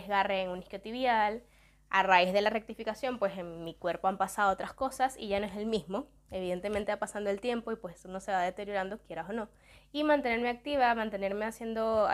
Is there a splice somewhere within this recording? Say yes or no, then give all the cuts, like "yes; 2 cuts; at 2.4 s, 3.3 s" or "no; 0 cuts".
no; 0 cuts